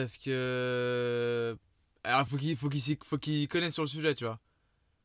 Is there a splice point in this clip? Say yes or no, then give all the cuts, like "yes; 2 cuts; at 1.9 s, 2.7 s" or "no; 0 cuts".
no; 0 cuts